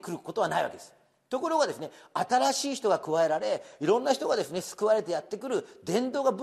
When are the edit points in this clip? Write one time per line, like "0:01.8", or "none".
none